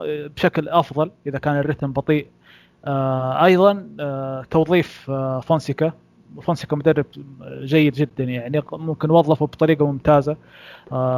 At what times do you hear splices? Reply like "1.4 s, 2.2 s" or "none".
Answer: none